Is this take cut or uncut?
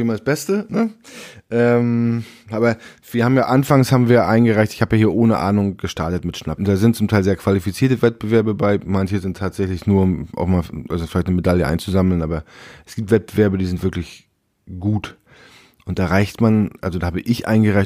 cut